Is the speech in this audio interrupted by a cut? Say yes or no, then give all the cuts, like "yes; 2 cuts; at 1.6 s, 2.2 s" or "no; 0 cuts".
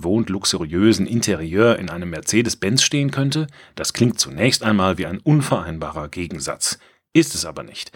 no; 0 cuts